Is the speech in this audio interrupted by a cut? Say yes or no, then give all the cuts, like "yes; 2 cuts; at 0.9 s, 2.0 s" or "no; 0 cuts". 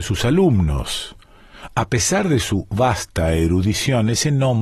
no; 0 cuts